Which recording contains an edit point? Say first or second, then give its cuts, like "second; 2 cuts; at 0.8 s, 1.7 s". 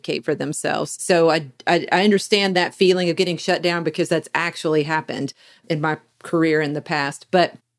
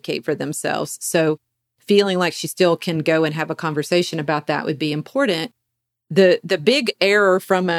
first; 1 cut; at 1.0 s